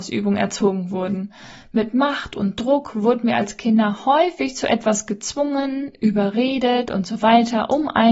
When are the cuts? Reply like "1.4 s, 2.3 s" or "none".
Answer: none